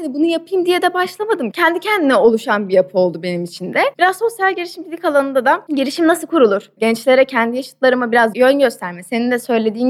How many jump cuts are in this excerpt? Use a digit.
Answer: 0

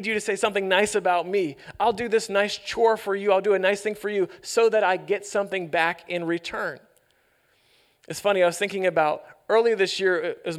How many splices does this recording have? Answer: 0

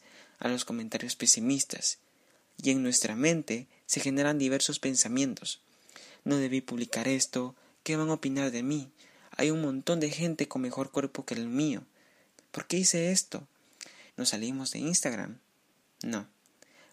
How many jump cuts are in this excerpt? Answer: 2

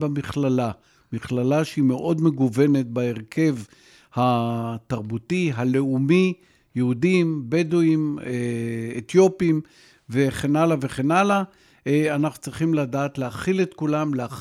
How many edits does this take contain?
0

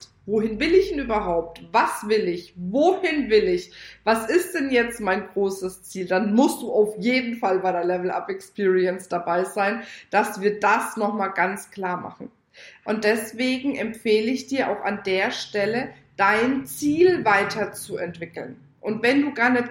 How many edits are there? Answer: 1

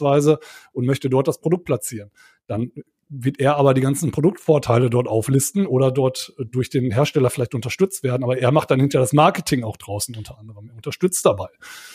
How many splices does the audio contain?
0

